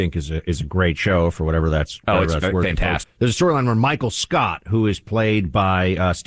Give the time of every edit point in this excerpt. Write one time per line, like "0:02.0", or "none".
0:03.0